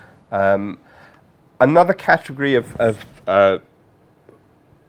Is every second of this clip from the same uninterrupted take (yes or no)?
yes